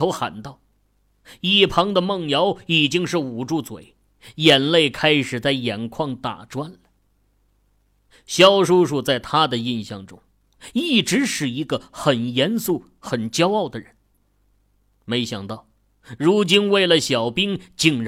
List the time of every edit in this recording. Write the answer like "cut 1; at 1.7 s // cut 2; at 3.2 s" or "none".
none